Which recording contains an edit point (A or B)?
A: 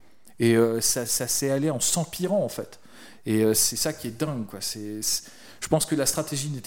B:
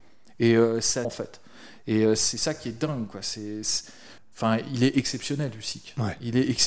B